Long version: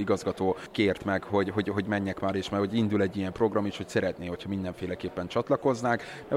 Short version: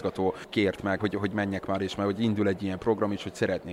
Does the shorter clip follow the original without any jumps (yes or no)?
no